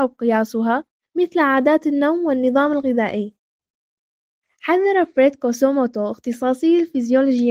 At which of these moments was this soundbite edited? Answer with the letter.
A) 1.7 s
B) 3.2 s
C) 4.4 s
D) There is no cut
C